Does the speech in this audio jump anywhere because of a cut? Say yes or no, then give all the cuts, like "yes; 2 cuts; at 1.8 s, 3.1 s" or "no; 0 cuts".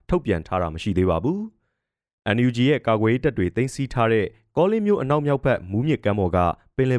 no; 0 cuts